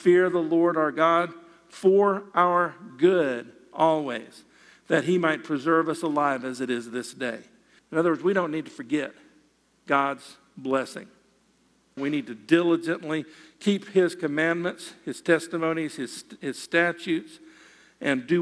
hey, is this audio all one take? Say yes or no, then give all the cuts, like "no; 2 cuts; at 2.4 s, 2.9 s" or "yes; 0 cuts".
no; 2 cuts; at 7.8 s, 12.0 s